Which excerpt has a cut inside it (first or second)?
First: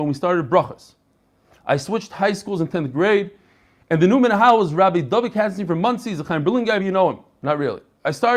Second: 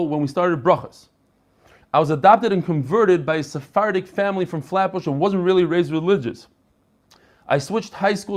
first